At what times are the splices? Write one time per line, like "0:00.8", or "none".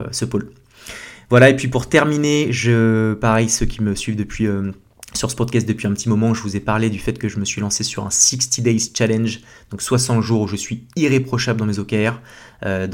none